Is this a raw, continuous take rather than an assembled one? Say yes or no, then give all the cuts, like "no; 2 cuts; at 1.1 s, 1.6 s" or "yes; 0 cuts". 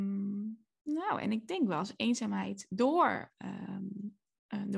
yes; 0 cuts